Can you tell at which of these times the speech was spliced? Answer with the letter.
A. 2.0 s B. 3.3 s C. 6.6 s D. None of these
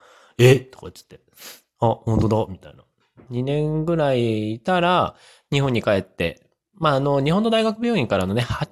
B